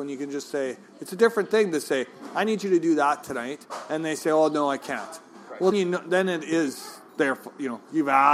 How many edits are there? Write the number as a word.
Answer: one